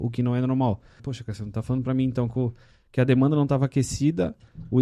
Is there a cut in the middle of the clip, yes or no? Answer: yes